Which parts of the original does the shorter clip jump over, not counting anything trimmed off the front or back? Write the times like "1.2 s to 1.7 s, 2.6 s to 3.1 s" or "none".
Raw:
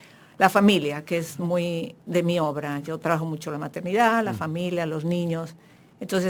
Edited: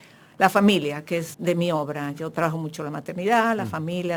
1.3 s to 2.0 s